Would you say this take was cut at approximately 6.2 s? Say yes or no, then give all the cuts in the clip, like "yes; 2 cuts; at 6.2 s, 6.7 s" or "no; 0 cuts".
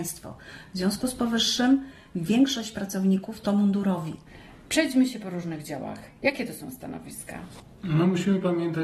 no; 0 cuts